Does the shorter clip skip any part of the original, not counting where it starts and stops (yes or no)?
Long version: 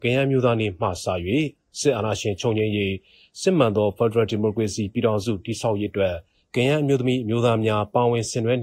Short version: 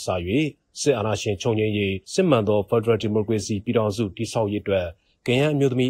yes